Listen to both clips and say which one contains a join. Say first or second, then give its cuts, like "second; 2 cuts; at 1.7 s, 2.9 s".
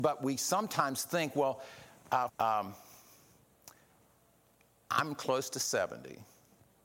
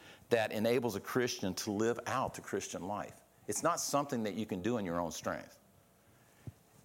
first; 1 cut; at 2.3 s